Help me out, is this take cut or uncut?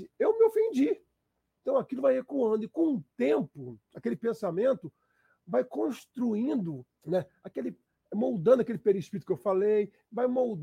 cut